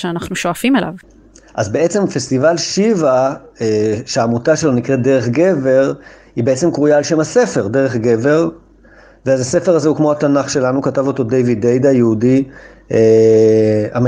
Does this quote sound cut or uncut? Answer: uncut